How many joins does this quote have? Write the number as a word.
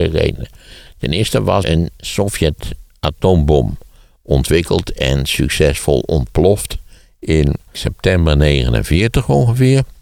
two